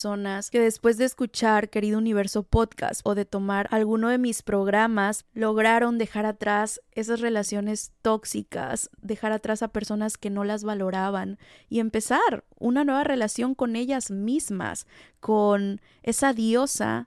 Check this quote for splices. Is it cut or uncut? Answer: cut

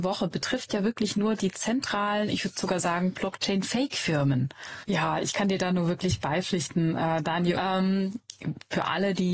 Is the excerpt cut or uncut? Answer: cut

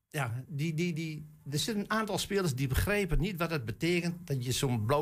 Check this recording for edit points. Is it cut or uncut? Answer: uncut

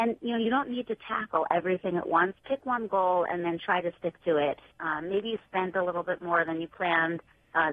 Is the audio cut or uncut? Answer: cut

